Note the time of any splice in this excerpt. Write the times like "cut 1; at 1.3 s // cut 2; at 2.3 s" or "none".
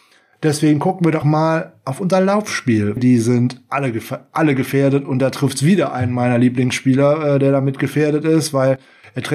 cut 1; at 1.2 s // cut 2; at 3.0 s